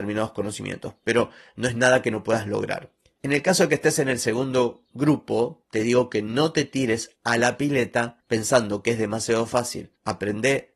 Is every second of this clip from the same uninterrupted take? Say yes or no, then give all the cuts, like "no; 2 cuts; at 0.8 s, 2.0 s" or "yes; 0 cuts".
yes; 0 cuts